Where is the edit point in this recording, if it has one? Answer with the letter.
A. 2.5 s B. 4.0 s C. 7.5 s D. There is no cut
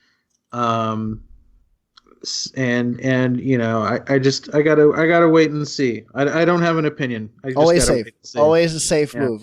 D